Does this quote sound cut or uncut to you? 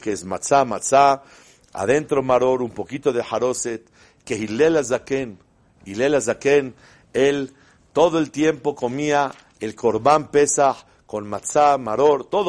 uncut